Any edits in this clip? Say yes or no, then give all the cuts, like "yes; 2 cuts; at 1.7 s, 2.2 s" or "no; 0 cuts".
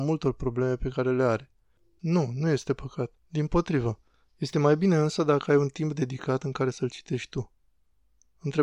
yes; 2 cuts; at 2.0 s, 3.2 s